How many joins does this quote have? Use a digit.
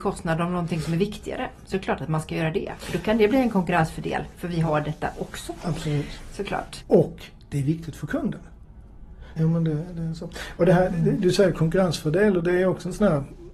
2